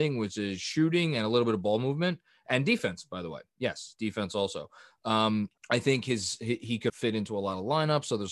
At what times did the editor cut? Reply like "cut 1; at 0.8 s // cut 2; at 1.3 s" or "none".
cut 1; at 5.6 s // cut 2; at 6.9 s